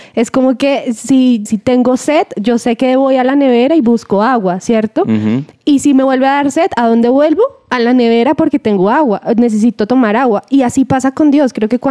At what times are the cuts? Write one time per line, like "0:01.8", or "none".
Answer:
0:01.5